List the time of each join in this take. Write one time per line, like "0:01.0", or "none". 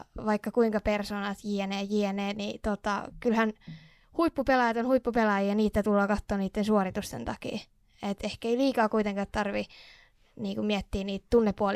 none

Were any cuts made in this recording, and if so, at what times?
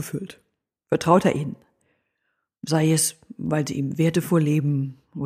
none

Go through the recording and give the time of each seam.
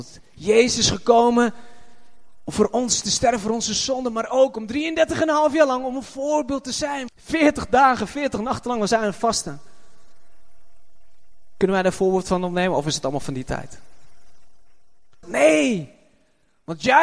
0:07.1
0:15.2

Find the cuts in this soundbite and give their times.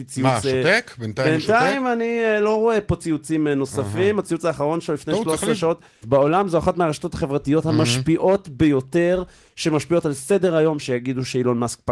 0:06.0
0:10.8

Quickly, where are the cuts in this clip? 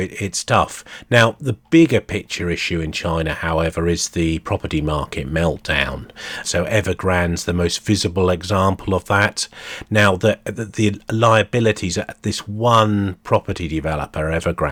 0:06.4

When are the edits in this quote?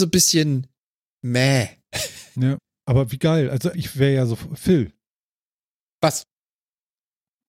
0:03.7

